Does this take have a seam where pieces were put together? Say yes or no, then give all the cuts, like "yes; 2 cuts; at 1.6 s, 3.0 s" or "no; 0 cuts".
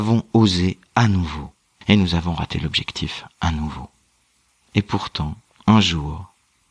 no; 0 cuts